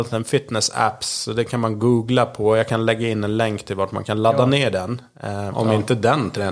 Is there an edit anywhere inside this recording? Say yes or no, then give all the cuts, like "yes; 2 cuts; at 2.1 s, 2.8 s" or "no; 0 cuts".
yes; 1 cut; at 5.5 s